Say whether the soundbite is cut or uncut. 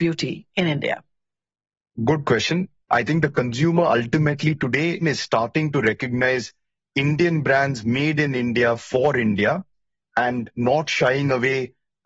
cut